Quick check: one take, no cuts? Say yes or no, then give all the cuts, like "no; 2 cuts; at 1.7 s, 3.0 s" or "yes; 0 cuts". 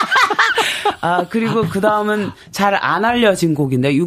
yes; 0 cuts